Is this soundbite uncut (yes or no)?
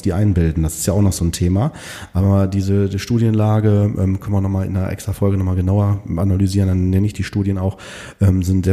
yes